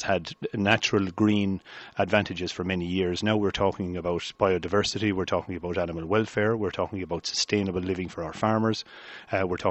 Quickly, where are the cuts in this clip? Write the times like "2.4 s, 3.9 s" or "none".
none